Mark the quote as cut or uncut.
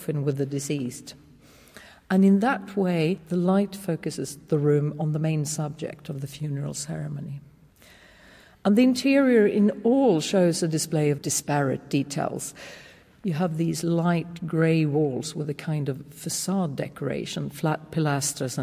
cut